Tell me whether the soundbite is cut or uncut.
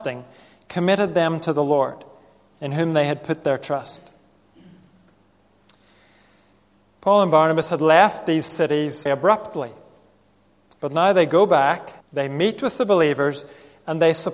cut